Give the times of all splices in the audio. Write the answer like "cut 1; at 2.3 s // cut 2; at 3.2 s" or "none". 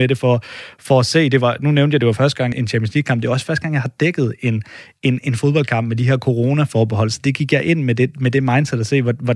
cut 1; at 2.5 s